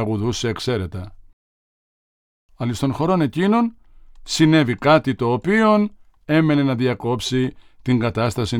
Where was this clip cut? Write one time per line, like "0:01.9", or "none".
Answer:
none